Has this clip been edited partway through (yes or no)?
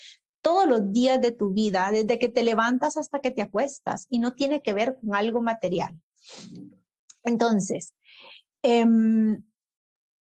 no